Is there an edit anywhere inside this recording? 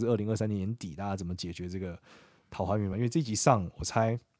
no; 0 cuts

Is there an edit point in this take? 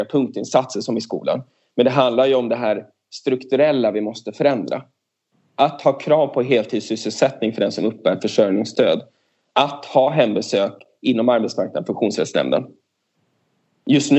no; 0 cuts

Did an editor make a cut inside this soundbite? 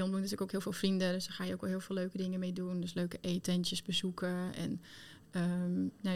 no; 0 cuts

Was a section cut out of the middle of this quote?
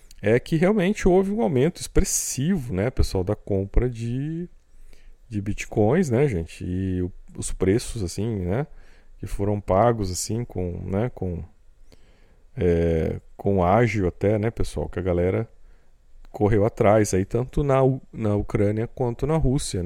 no; 0 cuts

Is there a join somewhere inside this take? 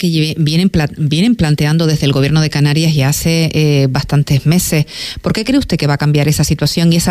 no; 0 cuts

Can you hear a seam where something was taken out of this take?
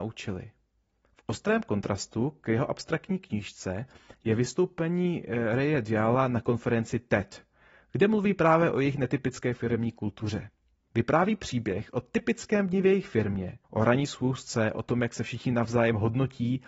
yes; 3 cuts; at 1.0 s, 10.9 s, 13.6 s

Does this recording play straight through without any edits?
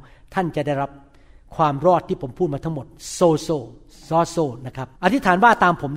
no; 1 cut; at 5.0 s

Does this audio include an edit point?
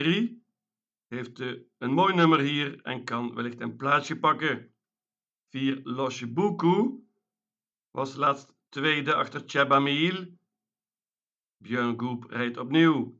no; 0 cuts

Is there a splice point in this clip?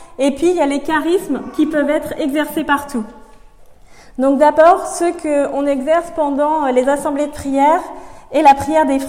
no; 0 cuts

